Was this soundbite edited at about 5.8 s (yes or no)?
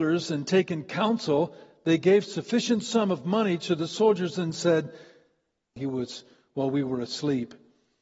yes